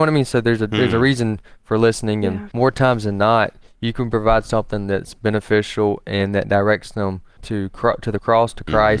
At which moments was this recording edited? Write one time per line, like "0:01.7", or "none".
0:02.5
0:07.4